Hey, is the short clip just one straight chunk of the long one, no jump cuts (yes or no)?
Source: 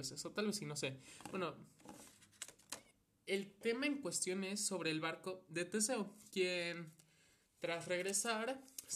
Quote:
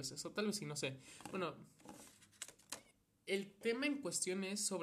yes